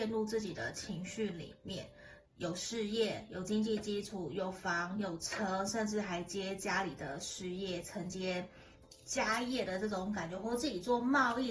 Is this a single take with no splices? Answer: no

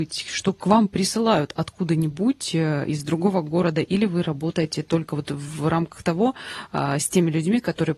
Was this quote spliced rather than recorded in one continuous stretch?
no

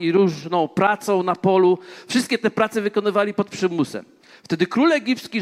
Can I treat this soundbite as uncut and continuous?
yes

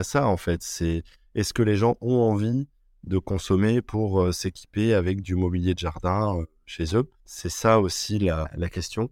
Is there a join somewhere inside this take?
no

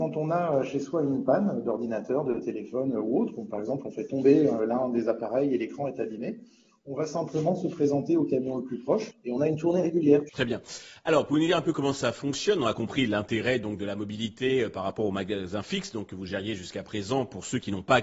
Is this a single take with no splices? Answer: no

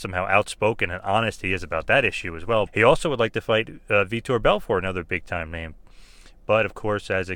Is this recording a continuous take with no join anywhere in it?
no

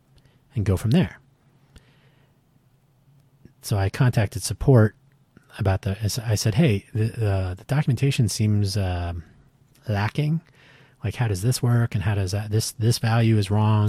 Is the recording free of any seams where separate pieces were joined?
yes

